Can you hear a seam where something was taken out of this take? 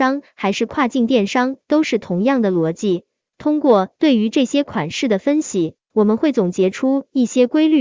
yes; 1 cut; at 3.3 s

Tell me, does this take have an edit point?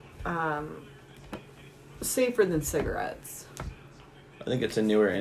no; 0 cuts

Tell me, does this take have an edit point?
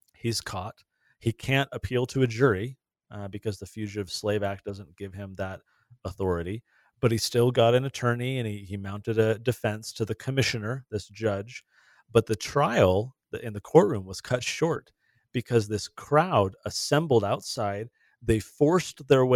no; 0 cuts

